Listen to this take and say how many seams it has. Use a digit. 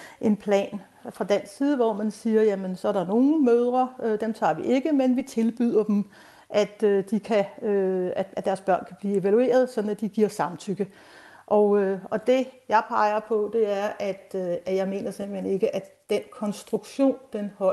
0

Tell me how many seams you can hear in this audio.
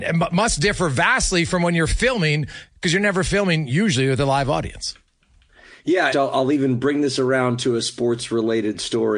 1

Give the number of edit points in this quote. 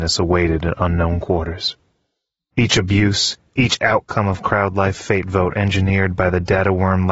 1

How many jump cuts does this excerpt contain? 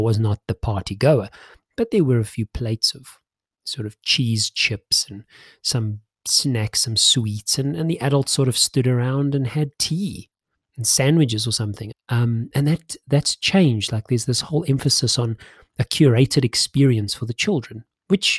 1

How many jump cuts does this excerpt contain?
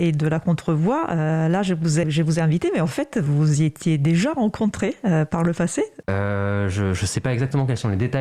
2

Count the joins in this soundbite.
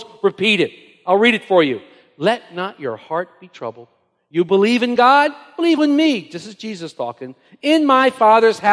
1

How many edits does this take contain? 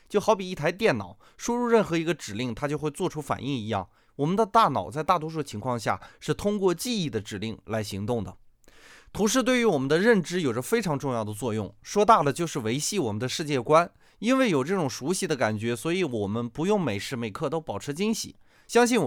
0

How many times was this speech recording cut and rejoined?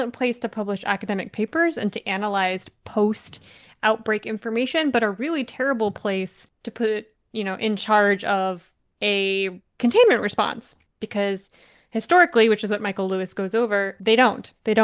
0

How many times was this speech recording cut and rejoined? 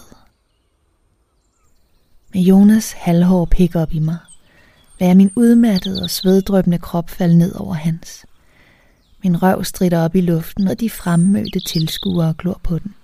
1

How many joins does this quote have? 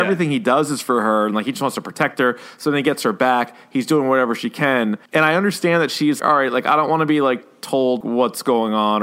3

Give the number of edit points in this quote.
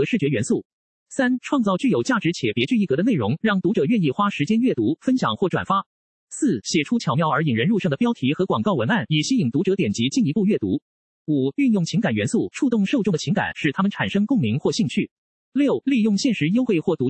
0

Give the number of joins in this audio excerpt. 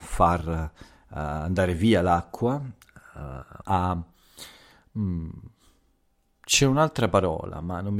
1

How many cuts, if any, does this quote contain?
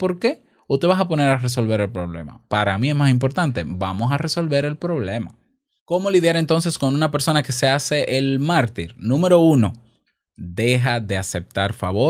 1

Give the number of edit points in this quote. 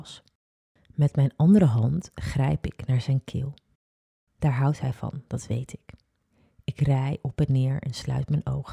0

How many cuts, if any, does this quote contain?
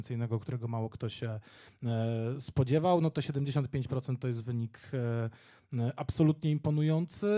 0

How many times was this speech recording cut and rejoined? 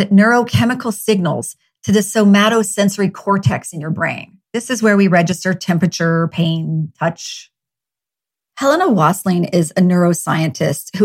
2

